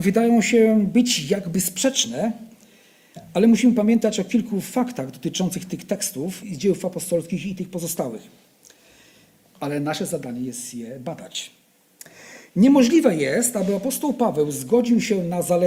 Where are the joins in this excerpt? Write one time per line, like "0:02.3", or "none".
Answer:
0:06.4
0:09.6